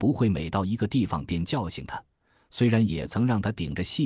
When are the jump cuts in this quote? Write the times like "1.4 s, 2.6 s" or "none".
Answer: none